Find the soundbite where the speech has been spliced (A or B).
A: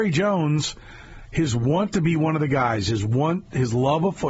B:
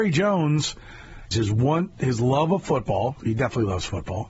B